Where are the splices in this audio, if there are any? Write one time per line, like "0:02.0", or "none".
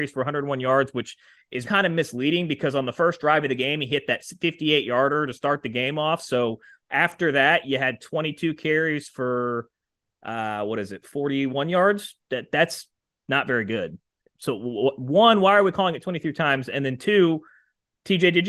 0:01.6